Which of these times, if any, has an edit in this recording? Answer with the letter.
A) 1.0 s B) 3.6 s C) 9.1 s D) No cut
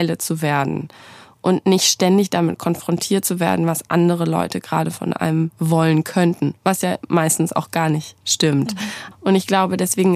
C